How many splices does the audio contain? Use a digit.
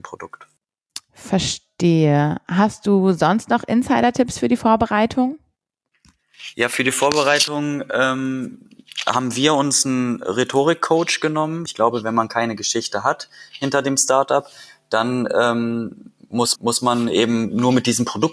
2